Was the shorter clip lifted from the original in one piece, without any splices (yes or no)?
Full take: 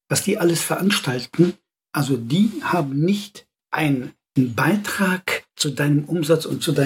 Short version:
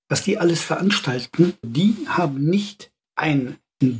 no